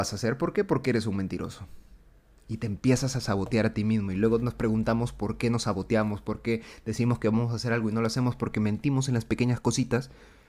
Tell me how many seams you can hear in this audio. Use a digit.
0